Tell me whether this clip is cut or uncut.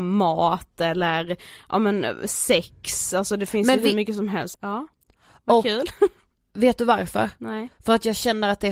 cut